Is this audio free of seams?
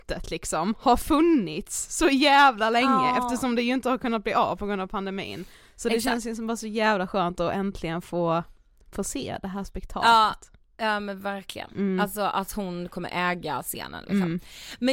yes; 0 cuts

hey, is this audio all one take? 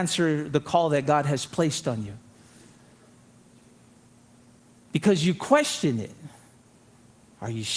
yes; 0 cuts

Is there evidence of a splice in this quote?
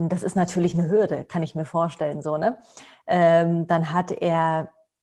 no; 0 cuts

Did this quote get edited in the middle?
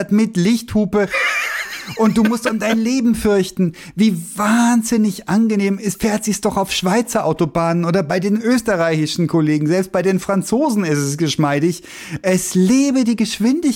no; 0 cuts

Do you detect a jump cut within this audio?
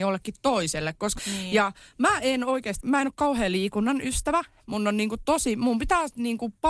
yes; 2 cuts; at 1.2 s, 2.8 s

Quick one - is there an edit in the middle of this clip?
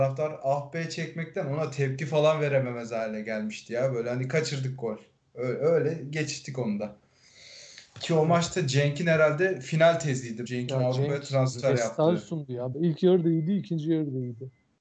yes; 2 cuts; at 10.5 s, 12.7 s

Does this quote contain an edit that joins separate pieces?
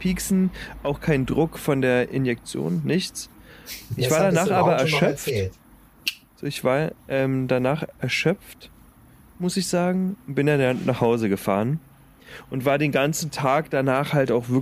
no; 0 cuts

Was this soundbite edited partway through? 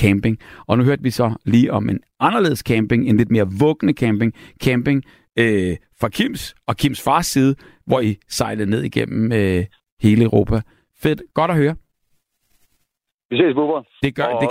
no; 0 cuts

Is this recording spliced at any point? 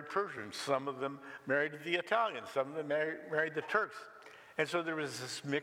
no; 0 cuts

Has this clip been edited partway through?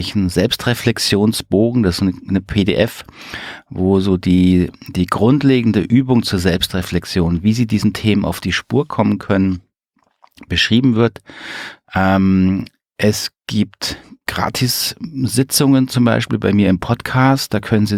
yes; 2 cuts; at 11.8 s, 14.2 s

